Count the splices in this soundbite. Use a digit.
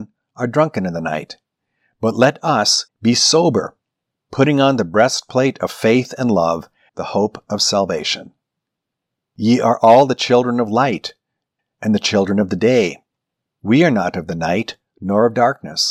3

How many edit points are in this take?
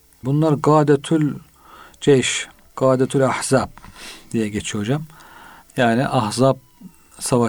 1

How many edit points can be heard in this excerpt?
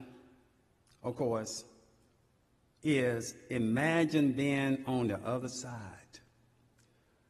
0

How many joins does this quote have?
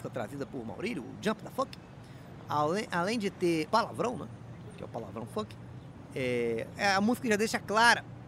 1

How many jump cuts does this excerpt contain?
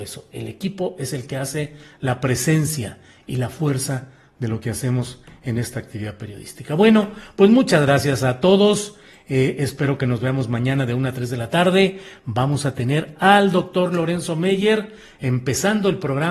0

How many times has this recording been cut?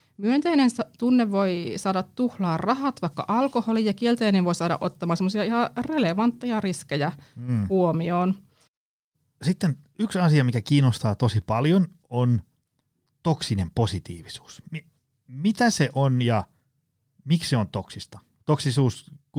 0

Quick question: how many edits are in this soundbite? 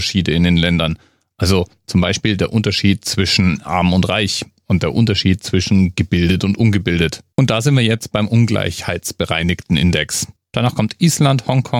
2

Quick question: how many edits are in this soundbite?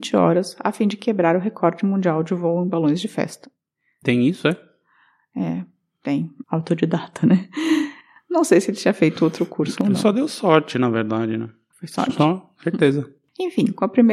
2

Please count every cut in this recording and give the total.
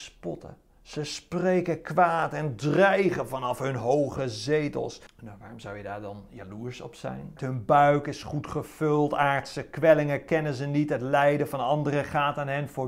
2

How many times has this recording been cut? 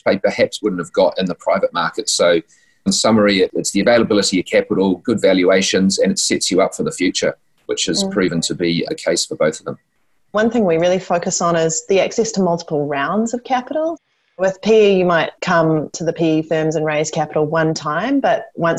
0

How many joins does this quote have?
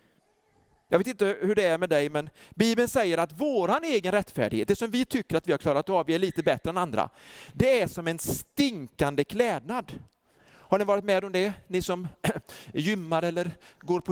0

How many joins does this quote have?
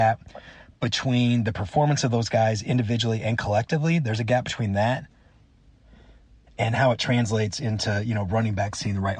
0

